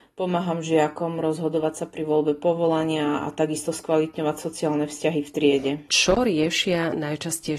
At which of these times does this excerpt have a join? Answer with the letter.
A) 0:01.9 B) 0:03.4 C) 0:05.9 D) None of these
C